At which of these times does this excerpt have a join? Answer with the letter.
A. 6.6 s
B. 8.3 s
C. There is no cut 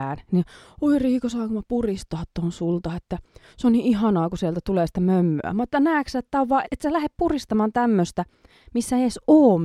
A